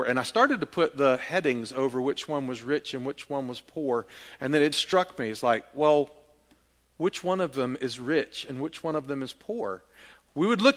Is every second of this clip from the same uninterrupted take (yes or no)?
no